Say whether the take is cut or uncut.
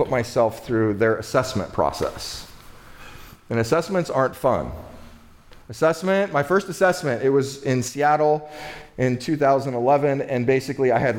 uncut